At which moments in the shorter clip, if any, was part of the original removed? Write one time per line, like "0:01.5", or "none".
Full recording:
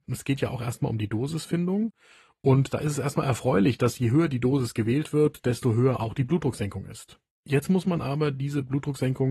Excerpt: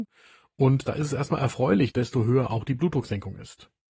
0:01.9